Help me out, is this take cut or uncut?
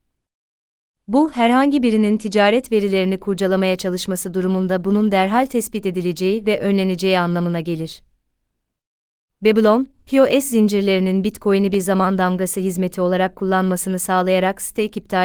cut